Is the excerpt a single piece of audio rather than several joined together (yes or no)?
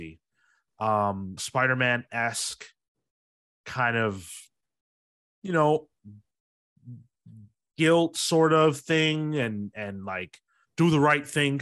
no